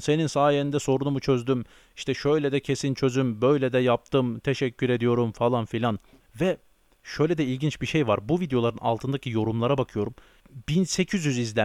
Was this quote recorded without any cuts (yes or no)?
no